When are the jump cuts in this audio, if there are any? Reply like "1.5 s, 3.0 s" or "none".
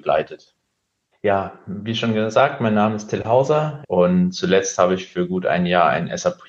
1.1 s, 3.8 s